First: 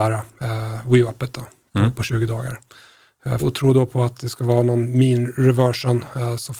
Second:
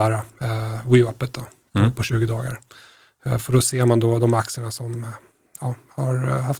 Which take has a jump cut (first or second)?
first